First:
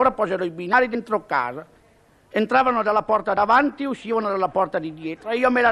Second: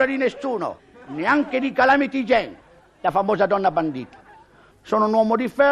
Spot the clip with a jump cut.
second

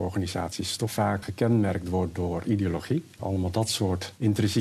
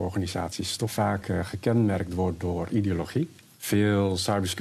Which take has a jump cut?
first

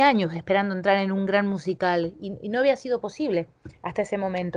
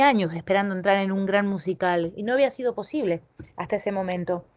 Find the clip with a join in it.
second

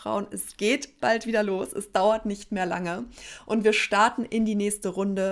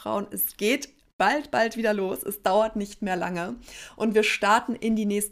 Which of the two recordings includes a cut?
first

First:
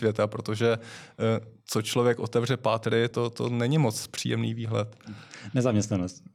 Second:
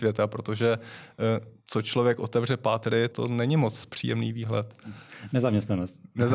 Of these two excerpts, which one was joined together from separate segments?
second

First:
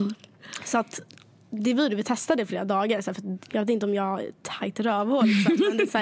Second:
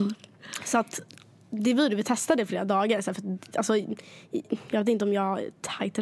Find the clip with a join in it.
first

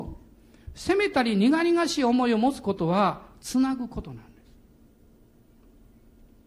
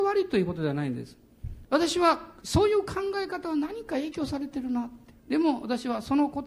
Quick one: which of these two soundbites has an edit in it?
second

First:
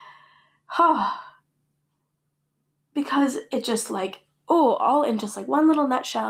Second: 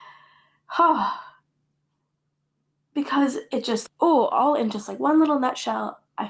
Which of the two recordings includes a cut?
second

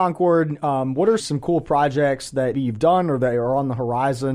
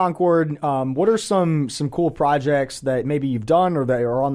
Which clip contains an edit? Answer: first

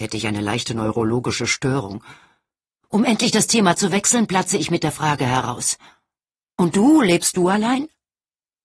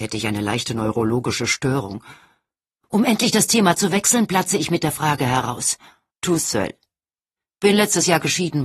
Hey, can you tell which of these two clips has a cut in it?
second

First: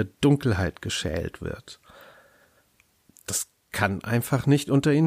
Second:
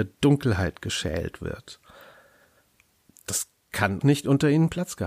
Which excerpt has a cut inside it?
second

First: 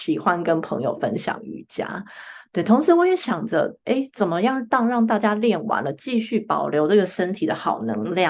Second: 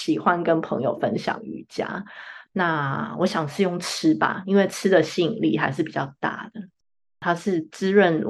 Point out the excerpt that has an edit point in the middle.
second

